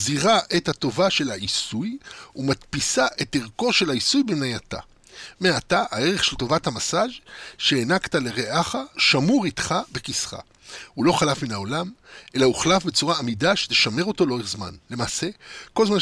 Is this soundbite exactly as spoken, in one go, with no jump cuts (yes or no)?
no